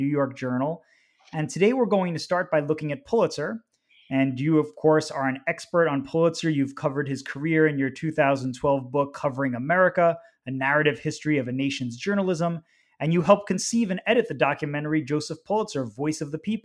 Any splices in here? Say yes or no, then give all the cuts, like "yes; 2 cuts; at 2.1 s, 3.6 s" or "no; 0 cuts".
no; 0 cuts